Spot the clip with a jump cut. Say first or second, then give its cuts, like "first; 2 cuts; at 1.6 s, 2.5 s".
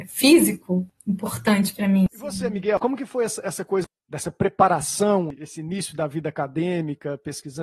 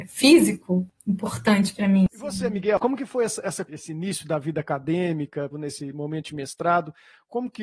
second; 2 cuts; at 3.7 s, 5.5 s